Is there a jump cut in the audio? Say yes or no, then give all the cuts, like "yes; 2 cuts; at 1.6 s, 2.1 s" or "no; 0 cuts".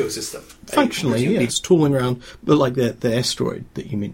yes; 1 cut; at 1.5 s